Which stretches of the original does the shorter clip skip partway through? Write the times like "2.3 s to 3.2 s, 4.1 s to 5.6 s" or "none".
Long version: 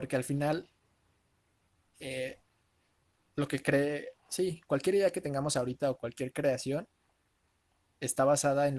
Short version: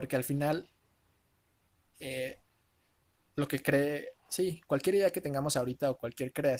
none